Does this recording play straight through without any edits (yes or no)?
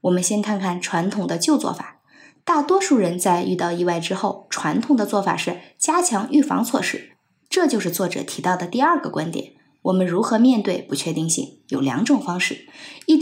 no